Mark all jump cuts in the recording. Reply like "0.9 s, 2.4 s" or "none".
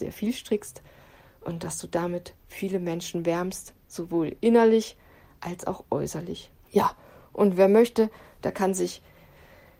6.6 s